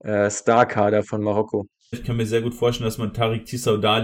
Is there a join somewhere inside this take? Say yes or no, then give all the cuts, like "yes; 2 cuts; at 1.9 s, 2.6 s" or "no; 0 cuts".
yes; 1 cut; at 1.9 s